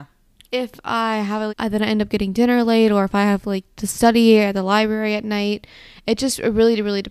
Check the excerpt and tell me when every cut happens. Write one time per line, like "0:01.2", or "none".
0:01.5